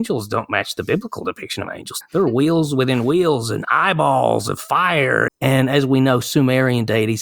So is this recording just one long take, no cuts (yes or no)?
no